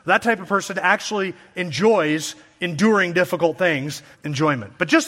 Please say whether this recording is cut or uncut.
cut